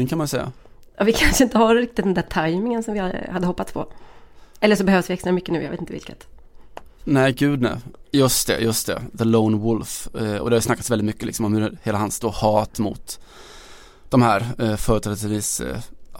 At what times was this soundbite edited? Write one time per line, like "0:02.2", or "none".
0:08.0